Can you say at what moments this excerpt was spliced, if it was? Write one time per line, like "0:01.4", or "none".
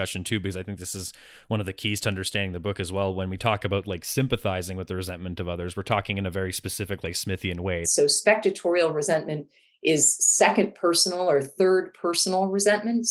0:07.8